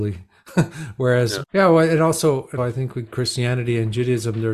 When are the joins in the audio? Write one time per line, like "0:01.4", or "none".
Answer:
0:01.4
0:02.6